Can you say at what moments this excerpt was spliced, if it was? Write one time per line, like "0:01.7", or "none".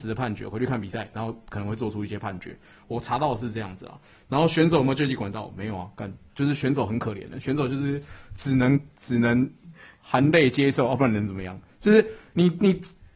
none